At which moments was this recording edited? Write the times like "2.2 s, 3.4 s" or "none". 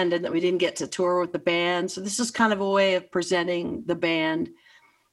none